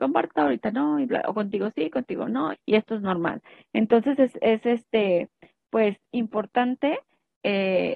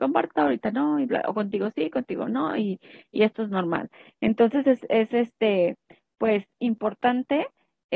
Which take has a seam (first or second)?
first